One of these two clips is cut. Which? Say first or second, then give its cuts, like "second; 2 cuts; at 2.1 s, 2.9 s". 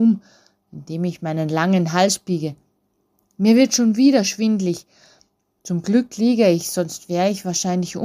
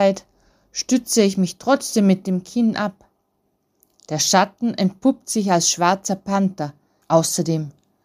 second; 1 cut; at 7.0 s